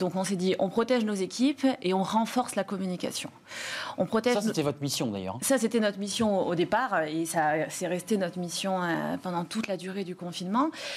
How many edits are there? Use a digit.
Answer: 0